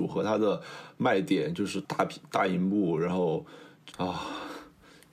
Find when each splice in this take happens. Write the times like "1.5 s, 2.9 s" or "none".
1.8 s, 3.9 s